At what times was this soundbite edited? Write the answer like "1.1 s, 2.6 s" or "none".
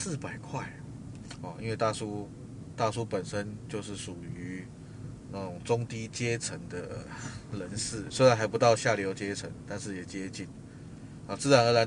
1.4 s, 8.1 s